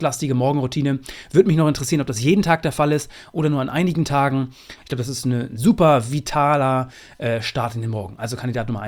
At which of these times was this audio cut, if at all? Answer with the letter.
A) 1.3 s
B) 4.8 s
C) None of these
B